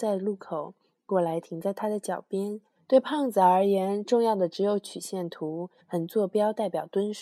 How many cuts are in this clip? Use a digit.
2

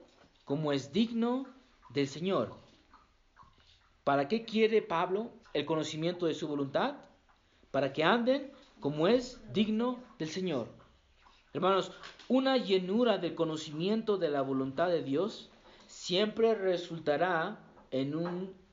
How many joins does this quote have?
1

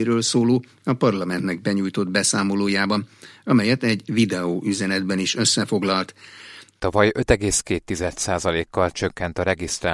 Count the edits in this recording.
1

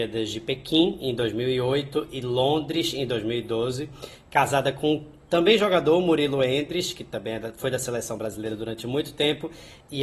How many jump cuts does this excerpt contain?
0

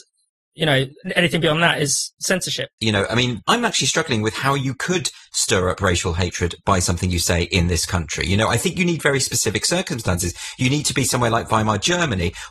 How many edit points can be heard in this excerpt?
1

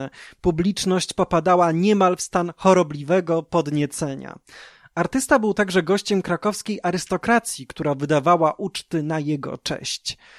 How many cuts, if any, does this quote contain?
0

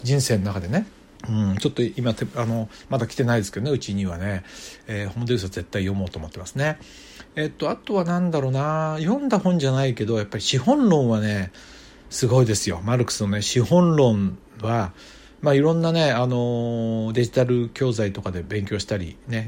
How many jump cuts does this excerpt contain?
1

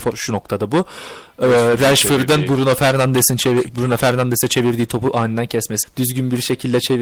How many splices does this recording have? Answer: 1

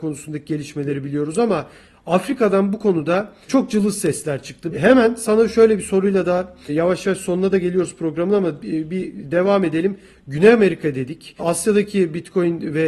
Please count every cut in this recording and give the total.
1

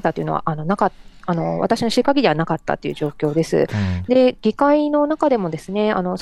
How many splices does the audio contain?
0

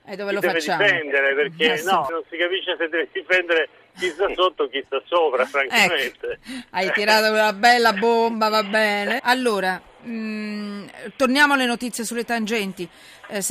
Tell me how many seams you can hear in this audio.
2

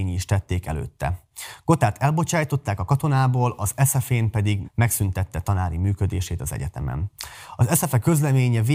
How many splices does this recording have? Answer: 1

